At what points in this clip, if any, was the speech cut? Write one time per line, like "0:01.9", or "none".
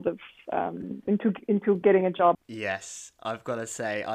0:02.3